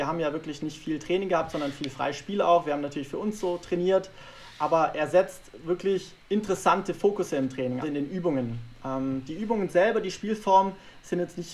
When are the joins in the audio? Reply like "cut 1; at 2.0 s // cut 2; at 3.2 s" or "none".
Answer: cut 1; at 6.2 s // cut 2; at 7.8 s